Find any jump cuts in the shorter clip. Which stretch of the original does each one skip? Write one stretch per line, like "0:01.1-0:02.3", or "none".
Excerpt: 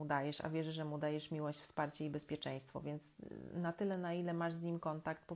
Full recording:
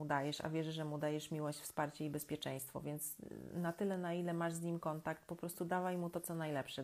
none